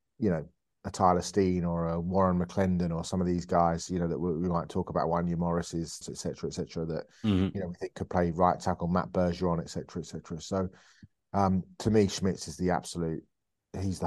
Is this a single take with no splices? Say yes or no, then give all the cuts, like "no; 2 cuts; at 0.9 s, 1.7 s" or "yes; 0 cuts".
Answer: no; 1 cut; at 6.0 s